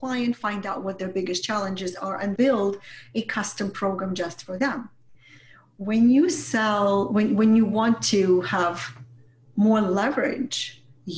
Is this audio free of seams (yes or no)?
no